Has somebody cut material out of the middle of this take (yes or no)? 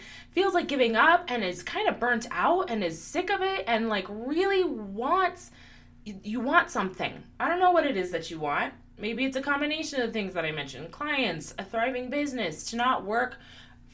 no